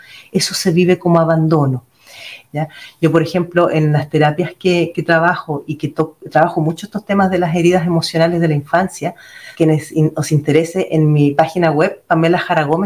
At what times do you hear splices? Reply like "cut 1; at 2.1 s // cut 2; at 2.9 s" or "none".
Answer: cut 1; at 2.4 s // cut 2; at 9.5 s